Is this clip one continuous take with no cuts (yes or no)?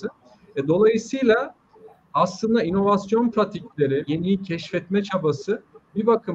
no